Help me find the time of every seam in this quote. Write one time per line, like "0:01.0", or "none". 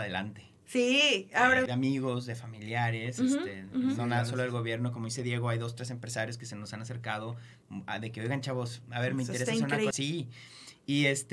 0:01.7
0:09.9